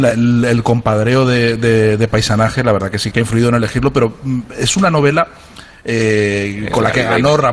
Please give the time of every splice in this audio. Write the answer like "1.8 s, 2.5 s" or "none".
3.1 s